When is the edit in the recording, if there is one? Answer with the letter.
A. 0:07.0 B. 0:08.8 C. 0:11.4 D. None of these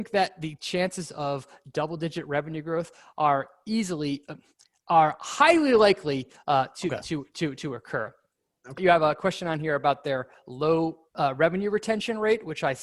B